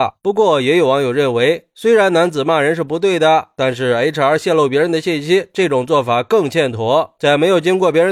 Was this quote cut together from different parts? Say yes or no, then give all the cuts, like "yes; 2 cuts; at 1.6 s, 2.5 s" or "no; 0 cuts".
no; 0 cuts